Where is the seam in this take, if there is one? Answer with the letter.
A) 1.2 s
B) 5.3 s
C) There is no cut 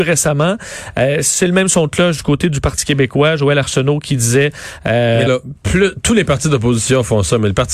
B